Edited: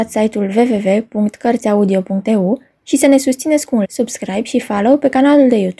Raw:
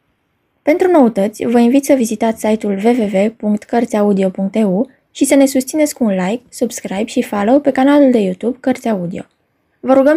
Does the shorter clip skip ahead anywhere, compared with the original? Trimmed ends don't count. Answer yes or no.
yes